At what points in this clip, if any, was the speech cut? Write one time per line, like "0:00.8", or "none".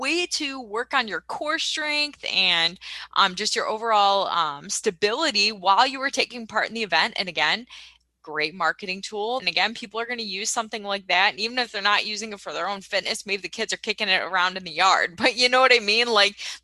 0:09.4